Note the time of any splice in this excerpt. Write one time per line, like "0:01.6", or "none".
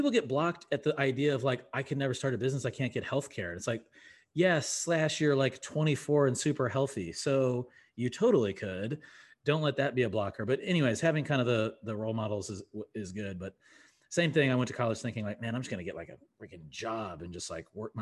none